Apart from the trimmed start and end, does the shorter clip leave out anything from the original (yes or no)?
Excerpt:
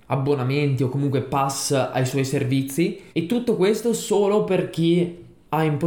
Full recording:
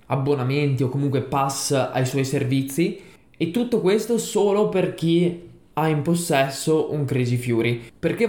yes